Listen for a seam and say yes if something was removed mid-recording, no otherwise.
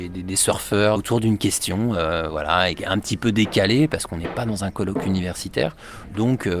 no